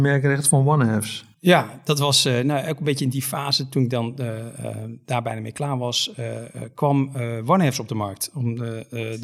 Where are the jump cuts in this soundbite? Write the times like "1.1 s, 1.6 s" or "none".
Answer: none